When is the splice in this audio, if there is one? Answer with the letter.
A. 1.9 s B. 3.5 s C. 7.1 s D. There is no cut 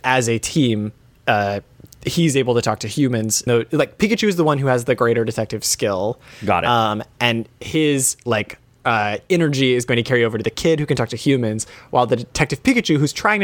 B